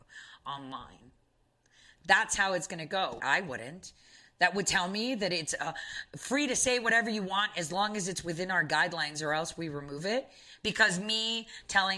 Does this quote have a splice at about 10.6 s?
yes; 2 cuts; at 3.2 s, 10.6 s

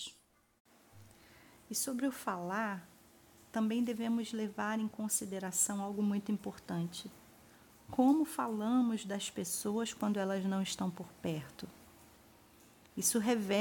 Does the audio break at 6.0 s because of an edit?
no; 0 cuts

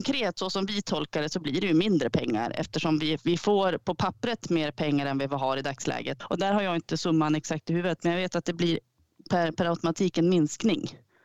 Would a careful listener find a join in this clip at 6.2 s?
yes; 1 cut; at 6.2 s

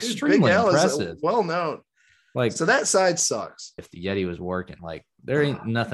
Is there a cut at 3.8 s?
yes; 2 cuts; at 3.8 s, 4.8 s

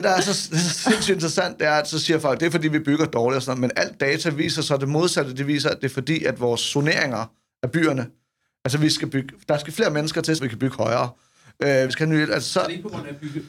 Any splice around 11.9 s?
yes; 2 cuts; at 10.4 s, 11.9 s

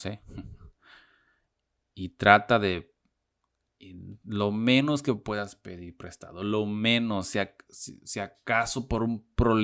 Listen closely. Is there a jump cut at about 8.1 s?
no; 0 cuts

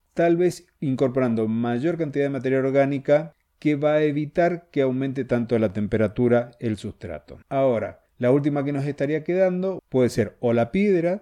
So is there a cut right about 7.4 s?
yes; 2 cuts; at 7.4 s, 9.8 s

